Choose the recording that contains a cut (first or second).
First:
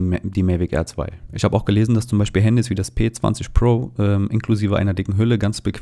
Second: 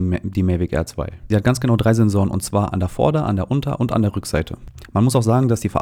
first